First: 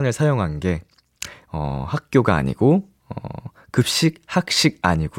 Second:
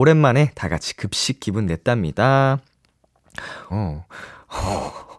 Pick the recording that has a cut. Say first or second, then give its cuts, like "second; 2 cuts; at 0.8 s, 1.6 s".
second; 1 cut; at 3.7 s